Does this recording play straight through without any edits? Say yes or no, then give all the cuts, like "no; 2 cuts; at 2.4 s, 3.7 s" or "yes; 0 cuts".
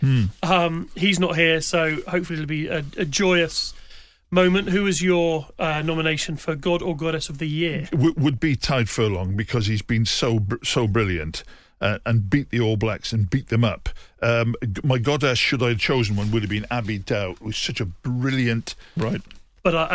no; 1 cut; at 18.9 s